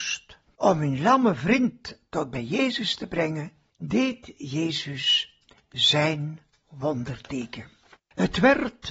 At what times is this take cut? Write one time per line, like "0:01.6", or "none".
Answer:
0:08.0